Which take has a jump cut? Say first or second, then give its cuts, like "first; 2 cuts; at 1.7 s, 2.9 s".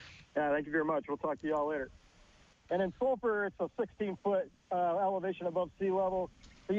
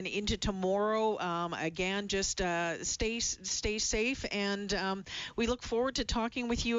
first; 1 cut; at 2.5 s